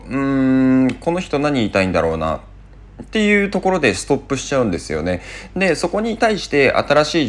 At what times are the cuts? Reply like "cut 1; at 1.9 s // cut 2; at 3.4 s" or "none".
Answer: cut 1; at 5.5 s

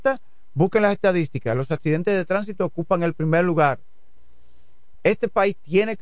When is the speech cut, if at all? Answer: cut 1; at 4.9 s

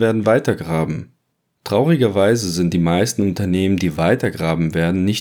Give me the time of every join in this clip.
none

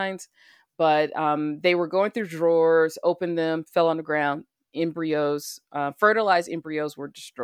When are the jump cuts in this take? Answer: none

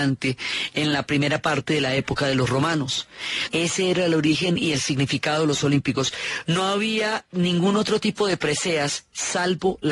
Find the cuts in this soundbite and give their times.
cut 1; at 3.5 s // cut 2; at 6.4 s

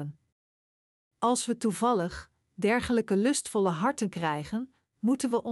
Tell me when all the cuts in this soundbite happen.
cut 1; at 1.1 s

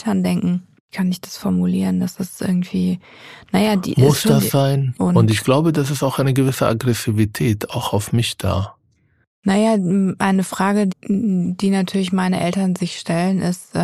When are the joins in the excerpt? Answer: cut 1; at 4.9 s // cut 2; at 10.9 s

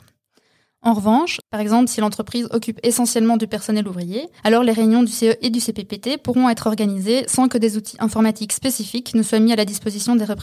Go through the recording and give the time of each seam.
cut 1; at 1.4 s // cut 2; at 4.4 s

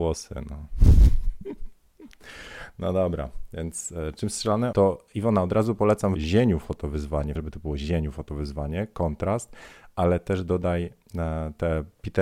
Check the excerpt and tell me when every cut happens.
cut 1; at 4.7 s // cut 2; at 6.1 s // cut 3; at 7.4 s

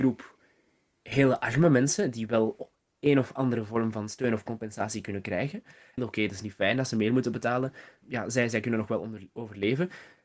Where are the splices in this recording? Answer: cut 1; at 6.0 s // cut 2; at 8.0 s

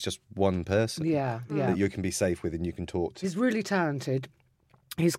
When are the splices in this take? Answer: cut 1; at 1.5 s // cut 2; at 3.2 s

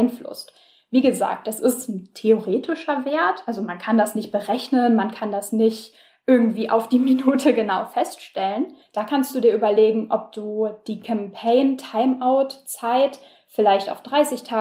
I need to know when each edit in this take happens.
cut 1; at 8.8 s

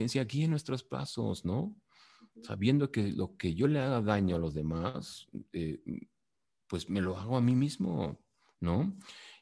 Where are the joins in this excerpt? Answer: none

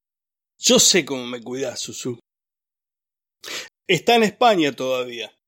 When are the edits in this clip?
cut 1; at 3.7 s

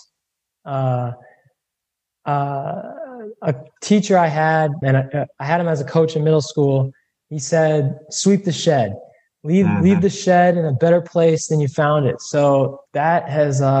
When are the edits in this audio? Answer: cut 1; at 4.8 s

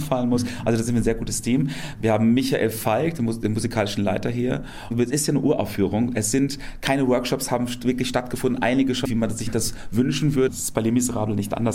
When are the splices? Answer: cut 1; at 9.1 s // cut 2; at 10.5 s

